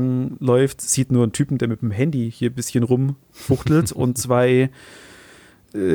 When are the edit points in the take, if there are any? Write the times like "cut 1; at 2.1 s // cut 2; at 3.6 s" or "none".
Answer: none